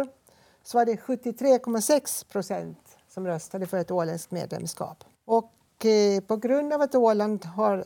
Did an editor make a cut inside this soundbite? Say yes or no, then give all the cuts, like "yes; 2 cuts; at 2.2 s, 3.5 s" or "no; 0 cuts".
yes; 1 cut; at 5.1 s